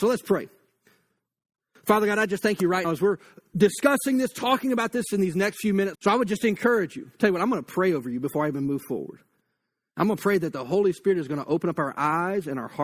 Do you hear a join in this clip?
yes; 2 cuts; at 2.8 s, 5.9 s

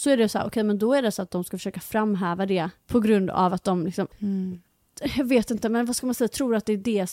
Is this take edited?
yes; 1 cut; at 4.1 s

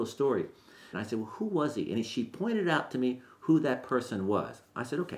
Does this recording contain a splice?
yes; 1 cut; at 0.9 s

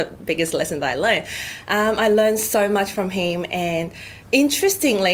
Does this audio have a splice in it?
yes; 1 cut; at 4.2 s

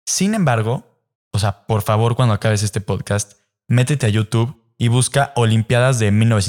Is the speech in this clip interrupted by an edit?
yes; 1 cut; at 1.1 s

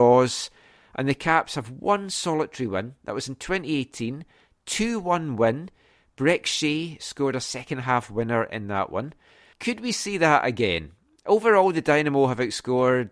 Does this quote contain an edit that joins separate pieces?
yes; 1 cut; at 9.5 s

